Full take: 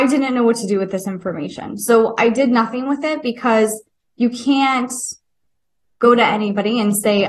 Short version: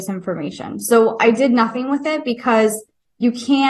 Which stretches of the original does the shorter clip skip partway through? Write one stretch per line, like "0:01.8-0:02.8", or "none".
none